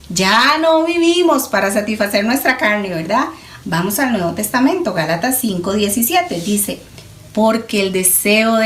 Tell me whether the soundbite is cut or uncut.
cut